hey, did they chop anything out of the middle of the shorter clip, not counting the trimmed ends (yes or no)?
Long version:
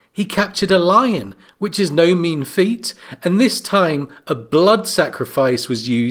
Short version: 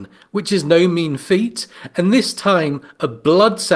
no